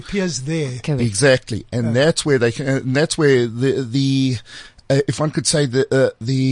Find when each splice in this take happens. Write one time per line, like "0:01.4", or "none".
none